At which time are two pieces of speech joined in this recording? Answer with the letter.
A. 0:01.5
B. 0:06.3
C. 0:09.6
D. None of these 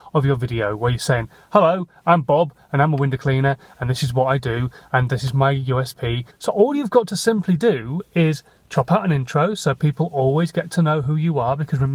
B